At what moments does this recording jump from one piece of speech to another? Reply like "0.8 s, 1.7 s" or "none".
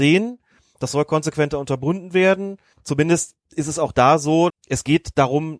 2.7 s, 4.5 s